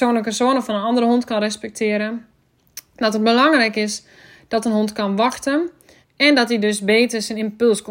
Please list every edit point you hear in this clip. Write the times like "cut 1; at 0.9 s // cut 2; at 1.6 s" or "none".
cut 1; at 6.0 s